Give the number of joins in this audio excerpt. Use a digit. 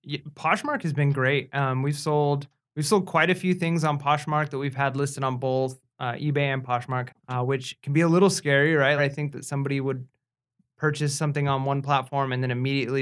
2